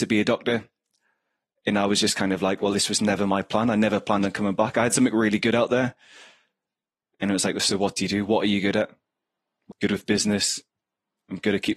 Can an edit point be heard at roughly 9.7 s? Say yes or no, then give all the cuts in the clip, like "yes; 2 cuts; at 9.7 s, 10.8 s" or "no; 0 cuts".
yes; 1 cut; at 9.7 s